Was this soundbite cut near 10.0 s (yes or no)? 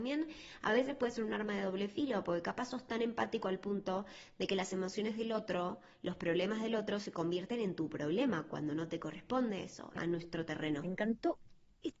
yes